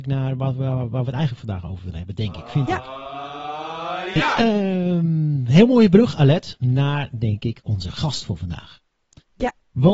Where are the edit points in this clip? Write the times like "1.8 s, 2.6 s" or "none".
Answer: none